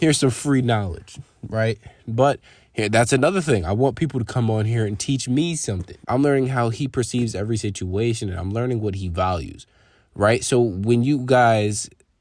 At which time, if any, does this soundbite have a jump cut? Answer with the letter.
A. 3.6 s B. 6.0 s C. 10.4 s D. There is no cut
B